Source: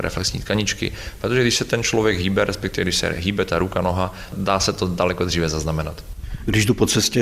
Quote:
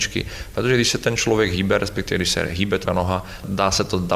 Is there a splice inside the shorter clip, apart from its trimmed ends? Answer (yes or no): yes